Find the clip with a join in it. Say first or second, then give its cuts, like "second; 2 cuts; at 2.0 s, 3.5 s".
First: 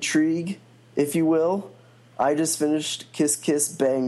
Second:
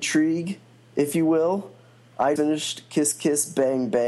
second; 1 cut; at 2.4 s